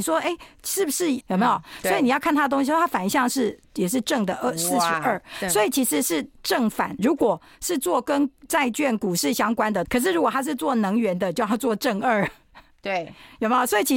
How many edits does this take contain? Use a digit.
3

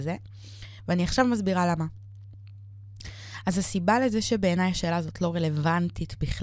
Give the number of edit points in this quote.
0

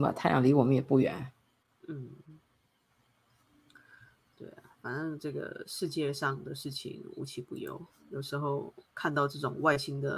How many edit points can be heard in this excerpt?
0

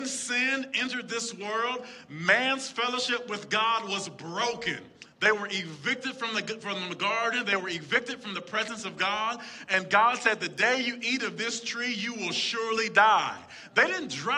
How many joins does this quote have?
0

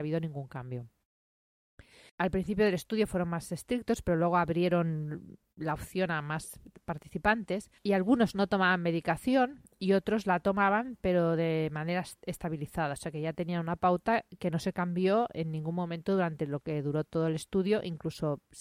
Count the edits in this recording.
2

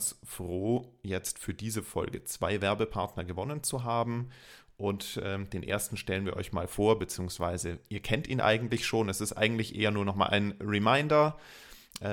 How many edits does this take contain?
0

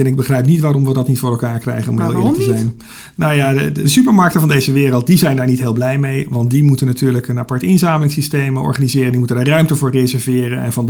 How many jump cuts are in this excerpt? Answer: 0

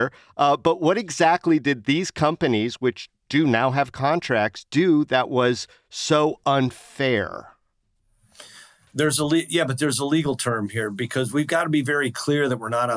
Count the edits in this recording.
1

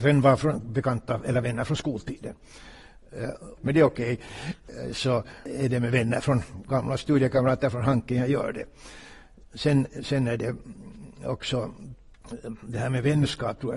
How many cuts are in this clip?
1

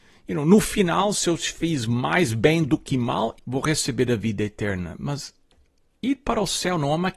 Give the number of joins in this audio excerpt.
1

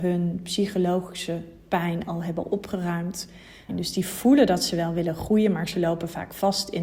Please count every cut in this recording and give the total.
1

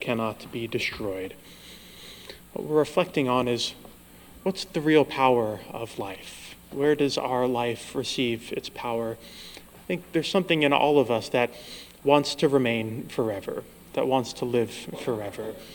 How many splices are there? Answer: 1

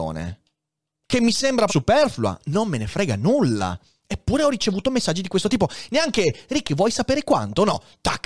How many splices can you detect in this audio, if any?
1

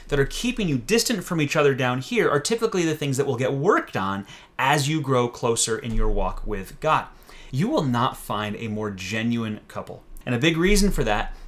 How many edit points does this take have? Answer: 2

